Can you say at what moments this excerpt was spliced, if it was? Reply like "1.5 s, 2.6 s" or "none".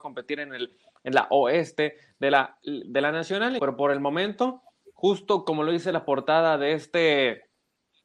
3.6 s